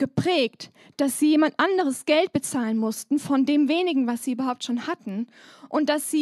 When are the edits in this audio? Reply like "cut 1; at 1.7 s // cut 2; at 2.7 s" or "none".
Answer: none